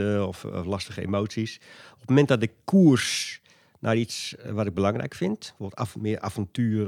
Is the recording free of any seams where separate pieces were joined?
yes; 0 cuts

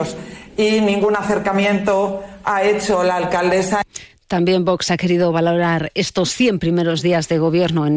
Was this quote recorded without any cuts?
yes; 0 cuts

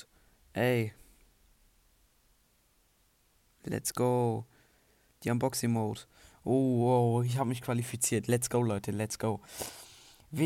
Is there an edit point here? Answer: no; 0 cuts

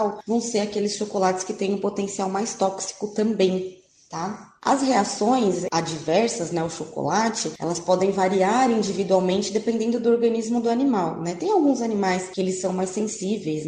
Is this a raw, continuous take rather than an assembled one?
yes; 0 cuts

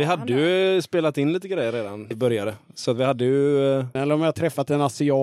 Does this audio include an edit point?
yes; 2 cuts; at 2.1 s, 4.0 s

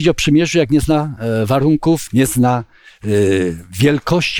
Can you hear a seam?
yes; 1 cut; at 2.1 s

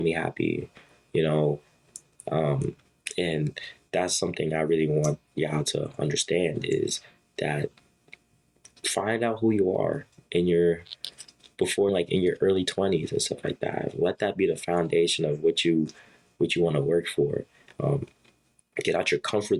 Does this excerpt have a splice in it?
yes; 2 cuts; at 11.9 s, 17.7 s

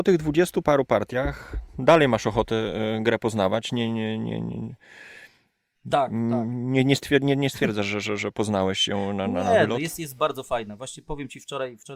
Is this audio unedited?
yes; 0 cuts

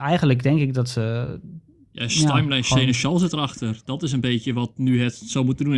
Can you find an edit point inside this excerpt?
no; 0 cuts

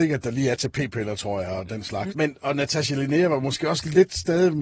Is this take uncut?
no; 1 cut; at 2.1 s

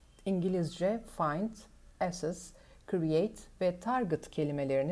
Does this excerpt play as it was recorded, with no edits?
yes; 0 cuts

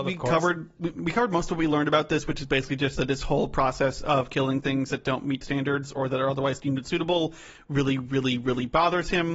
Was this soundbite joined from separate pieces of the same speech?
no; 0 cuts

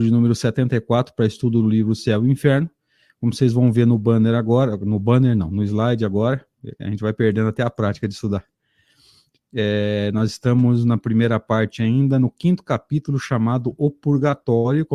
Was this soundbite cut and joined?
no; 0 cuts

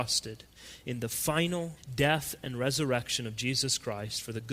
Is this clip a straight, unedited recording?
no; 1 cut; at 1.8 s

